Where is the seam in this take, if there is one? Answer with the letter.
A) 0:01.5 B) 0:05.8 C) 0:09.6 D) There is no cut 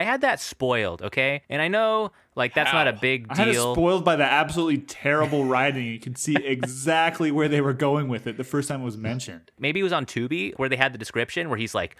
C